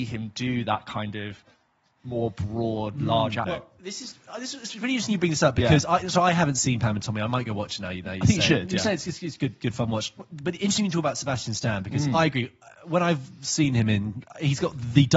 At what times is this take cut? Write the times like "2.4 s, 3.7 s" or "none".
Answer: 3.4 s